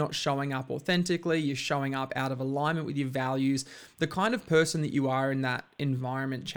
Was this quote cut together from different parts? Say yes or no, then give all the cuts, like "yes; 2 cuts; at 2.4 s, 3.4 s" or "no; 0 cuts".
no; 0 cuts